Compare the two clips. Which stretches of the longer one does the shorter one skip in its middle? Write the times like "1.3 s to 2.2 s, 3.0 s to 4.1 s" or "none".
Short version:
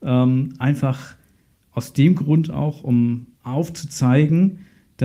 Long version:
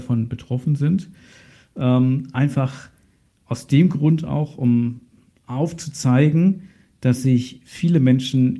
5.1 s to 5.4 s